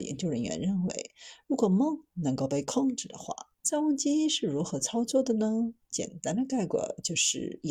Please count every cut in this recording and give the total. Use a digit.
1